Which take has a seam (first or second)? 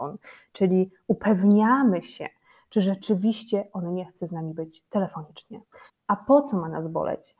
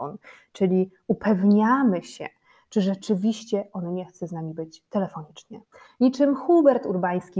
first